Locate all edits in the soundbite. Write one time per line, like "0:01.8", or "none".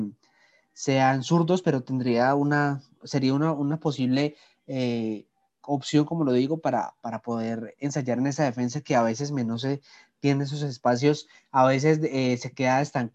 none